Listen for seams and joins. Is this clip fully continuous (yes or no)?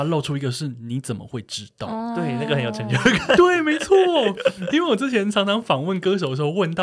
yes